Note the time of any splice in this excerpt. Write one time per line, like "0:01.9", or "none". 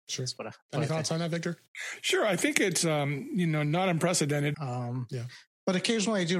0:04.5

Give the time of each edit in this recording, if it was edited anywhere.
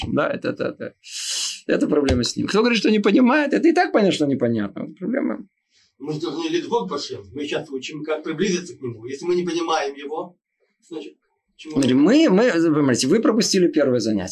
none

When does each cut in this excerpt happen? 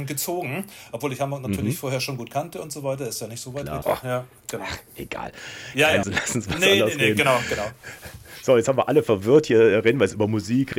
0:03.8
0:06.0

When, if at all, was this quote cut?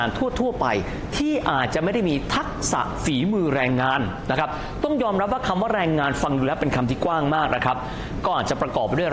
none

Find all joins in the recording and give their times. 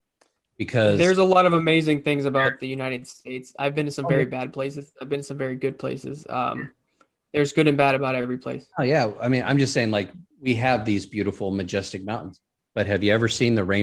0:10.3

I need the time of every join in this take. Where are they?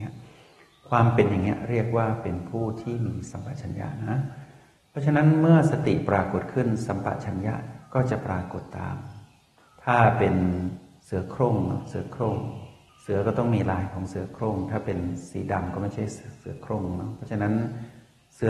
none

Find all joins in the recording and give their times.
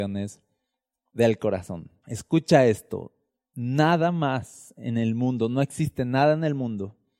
0:02.0

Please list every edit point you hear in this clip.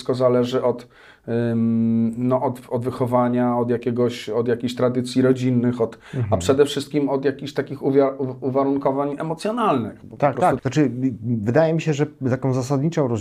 0:10.6

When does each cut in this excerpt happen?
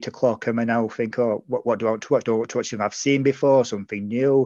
none

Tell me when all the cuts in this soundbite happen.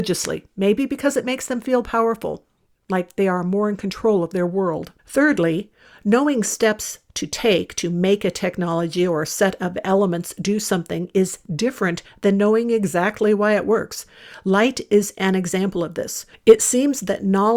0:05.0
0:16.3

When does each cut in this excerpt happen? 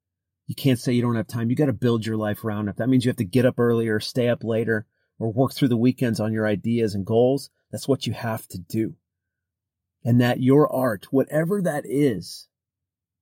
none

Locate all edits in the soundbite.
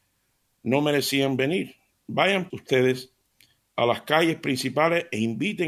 0:02.5

